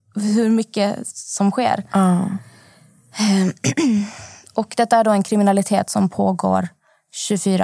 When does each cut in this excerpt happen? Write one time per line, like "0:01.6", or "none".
none